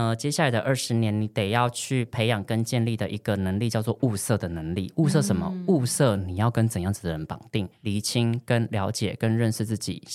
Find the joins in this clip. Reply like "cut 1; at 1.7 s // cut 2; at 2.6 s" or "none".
cut 1; at 7.7 s